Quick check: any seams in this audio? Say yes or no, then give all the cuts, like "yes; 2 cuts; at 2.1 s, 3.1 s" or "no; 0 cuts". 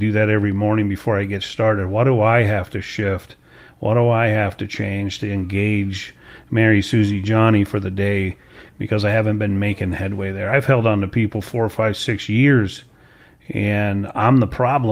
no; 0 cuts